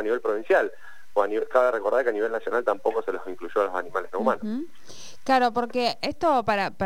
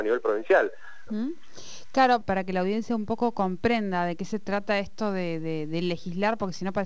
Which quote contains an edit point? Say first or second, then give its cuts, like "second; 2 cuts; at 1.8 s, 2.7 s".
second; 2 cuts; at 1.1 s, 2.2 s